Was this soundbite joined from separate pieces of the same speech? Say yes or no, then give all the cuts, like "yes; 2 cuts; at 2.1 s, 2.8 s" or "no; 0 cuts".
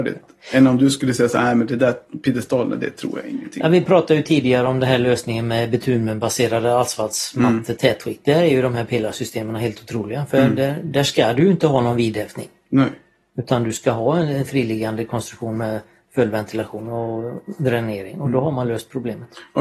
no; 0 cuts